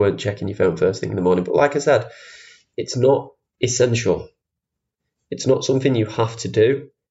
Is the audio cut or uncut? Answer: uncut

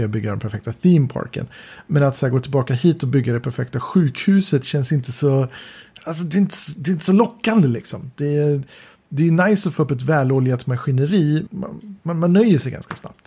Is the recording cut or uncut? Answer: cut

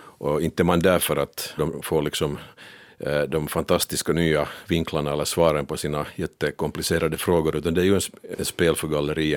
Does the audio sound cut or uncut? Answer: cut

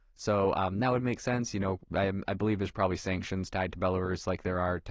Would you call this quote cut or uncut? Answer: uncut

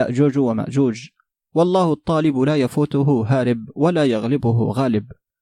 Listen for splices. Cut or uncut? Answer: uncut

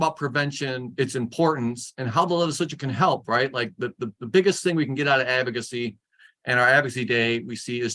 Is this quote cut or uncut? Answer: uncut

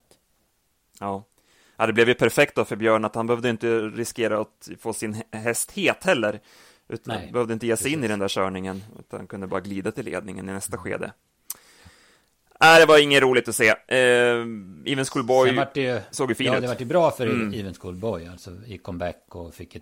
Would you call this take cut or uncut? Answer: uncut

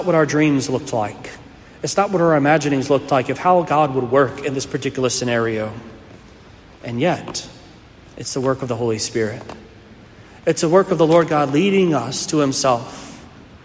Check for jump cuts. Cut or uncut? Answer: uncut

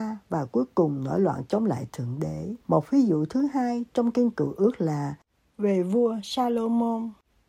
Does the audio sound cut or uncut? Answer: cut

